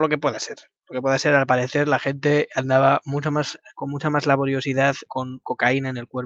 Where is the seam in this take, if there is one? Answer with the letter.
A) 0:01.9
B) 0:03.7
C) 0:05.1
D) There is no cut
C